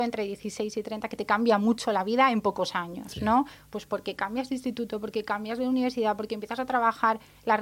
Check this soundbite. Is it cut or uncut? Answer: uncut